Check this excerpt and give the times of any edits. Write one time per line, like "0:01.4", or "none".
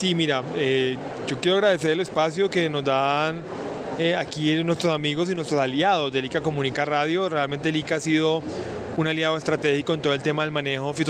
none